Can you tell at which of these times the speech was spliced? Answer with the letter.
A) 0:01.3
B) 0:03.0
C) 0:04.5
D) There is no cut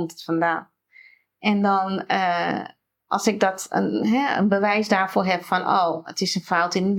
D